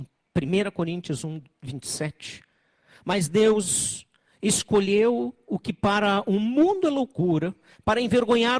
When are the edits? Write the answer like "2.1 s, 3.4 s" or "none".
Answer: none